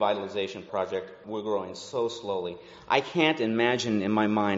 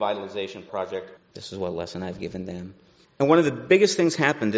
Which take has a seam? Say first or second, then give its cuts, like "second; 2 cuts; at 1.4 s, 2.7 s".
second; 1 cut; at 1.2 s